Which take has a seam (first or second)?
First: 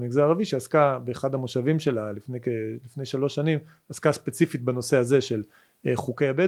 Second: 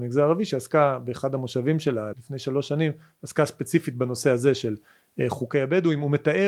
second